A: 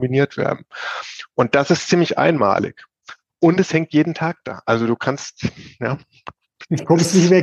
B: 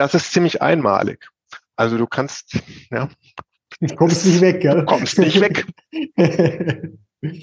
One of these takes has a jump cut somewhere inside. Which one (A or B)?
B